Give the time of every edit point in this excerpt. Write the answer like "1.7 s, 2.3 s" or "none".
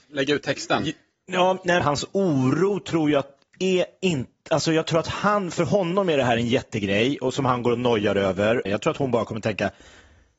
1.8 s, 8.7 s